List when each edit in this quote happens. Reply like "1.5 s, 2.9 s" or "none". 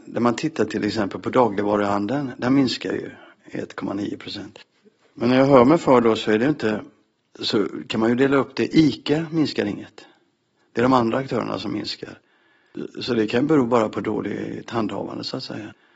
none